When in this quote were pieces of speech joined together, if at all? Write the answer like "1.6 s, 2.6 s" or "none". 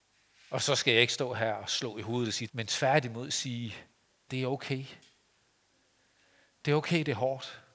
2.5 s, 4.3 s